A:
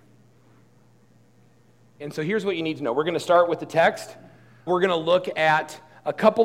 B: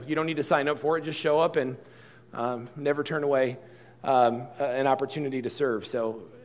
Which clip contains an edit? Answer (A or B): A